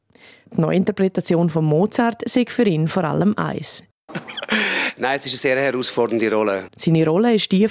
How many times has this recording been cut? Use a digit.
2